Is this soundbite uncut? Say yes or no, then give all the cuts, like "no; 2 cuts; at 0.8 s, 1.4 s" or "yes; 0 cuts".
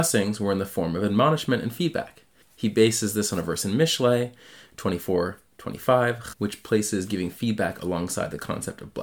no; 2 cuts; at 2.4 s, 6.3 s